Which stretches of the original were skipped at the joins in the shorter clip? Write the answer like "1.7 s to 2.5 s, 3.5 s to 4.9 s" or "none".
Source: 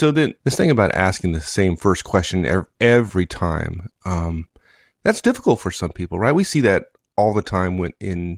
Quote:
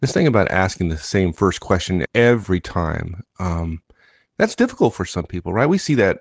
2.5 s to 2.7 s